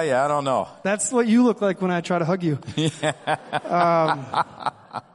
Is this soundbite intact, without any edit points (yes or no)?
yes